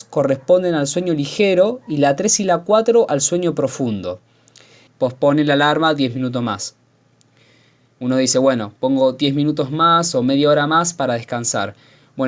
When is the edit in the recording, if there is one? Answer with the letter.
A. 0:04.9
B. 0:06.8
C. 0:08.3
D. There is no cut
A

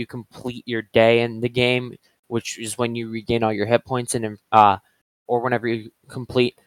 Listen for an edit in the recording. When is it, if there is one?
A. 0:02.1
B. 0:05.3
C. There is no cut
B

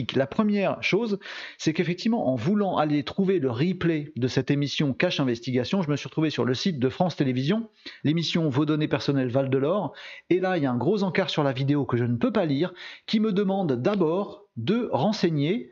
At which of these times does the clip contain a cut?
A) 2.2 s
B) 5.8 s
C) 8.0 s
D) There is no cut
C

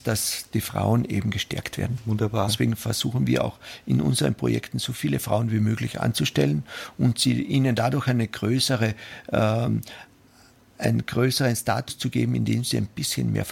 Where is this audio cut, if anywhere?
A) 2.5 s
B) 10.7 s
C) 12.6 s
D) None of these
A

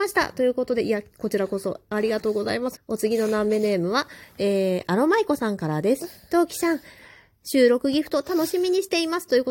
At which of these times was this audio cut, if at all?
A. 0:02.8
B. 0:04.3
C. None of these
A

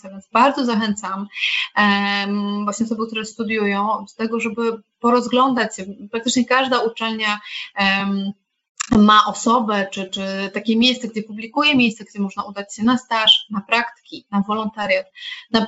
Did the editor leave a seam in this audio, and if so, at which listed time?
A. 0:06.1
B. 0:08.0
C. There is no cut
C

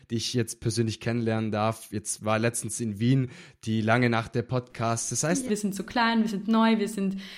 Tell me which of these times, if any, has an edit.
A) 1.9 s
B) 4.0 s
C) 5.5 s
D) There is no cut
C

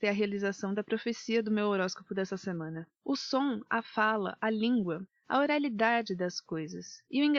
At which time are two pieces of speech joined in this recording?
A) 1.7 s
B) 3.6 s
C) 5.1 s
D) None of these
C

